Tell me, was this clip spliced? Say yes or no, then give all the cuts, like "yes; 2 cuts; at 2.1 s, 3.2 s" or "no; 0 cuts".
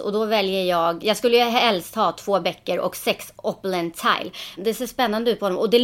yes; 2 cuts; at 1.0 s, 4.6 s